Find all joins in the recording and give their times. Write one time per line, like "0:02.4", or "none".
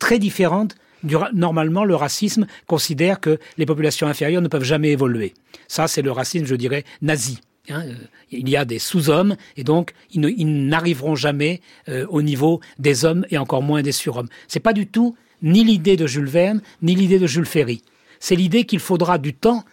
none